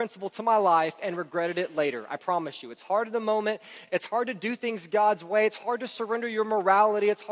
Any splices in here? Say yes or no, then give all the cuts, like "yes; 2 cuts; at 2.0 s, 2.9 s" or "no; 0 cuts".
no; 0 cuts